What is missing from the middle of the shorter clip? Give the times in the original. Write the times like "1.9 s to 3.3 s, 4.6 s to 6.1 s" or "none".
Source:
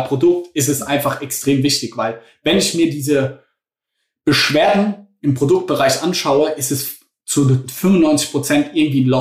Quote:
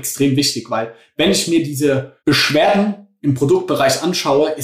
3.5 s to 4.2 s